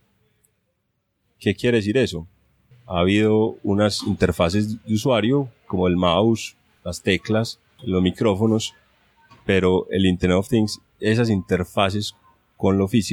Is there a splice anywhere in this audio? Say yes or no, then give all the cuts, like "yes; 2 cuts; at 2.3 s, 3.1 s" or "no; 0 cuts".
yes; 2 cuts; at 2.7 s, 7.8 s